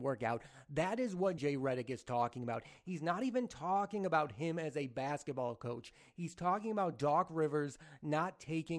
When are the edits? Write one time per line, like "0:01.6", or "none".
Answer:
0:01.4